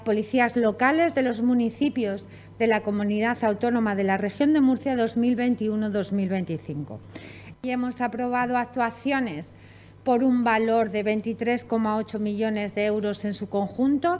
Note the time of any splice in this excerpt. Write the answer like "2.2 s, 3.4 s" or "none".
7.5 s